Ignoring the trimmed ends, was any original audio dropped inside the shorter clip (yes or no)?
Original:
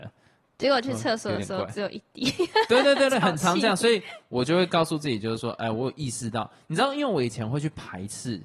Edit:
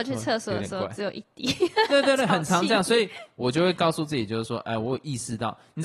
yes